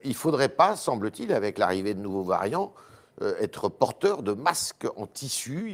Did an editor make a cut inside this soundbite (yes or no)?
no